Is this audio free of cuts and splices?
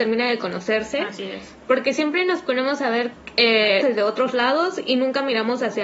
no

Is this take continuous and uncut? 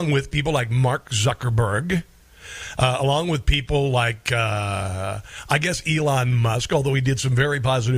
yes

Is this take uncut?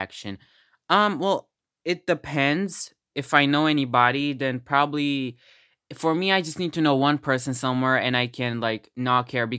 yes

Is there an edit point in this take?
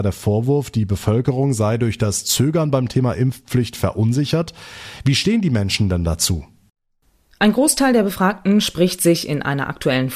no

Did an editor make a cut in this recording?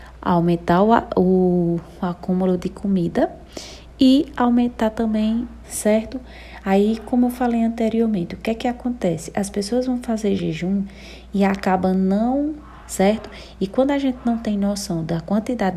yes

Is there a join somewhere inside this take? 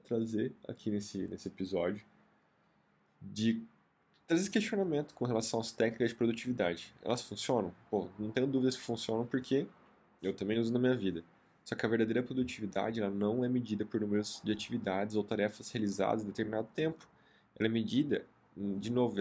no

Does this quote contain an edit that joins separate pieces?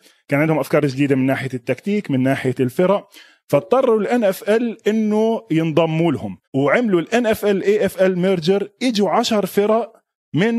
yes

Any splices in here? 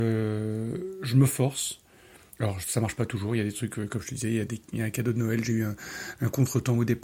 no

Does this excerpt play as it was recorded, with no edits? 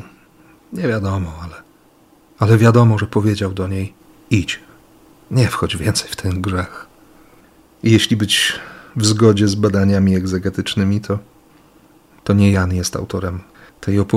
yes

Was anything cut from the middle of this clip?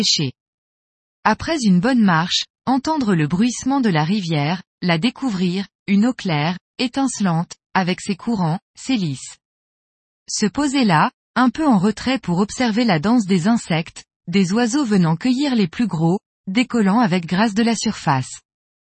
no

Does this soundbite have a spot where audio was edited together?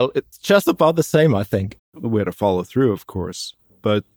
yes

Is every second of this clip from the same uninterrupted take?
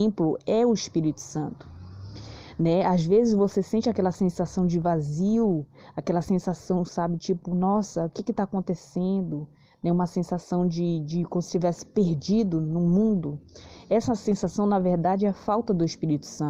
yes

